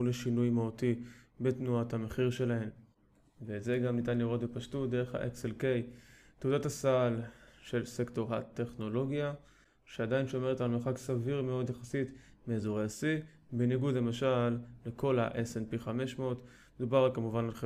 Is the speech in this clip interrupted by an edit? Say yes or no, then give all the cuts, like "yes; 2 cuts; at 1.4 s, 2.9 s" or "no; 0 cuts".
no; 0 cuts